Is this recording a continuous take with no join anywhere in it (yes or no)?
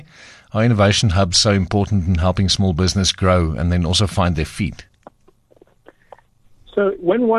yes